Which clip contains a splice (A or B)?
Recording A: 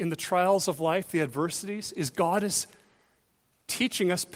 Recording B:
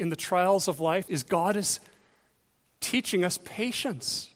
B